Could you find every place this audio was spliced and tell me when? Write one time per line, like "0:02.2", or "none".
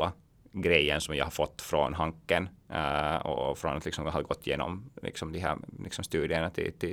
none